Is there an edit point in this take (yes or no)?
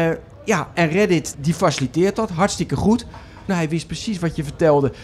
yes